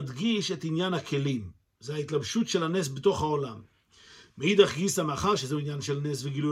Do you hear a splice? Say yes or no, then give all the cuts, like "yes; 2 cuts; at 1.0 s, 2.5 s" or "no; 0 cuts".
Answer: no; 0 cuts